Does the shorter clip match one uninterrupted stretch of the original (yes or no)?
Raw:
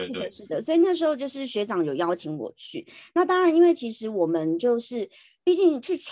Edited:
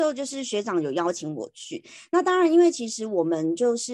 yes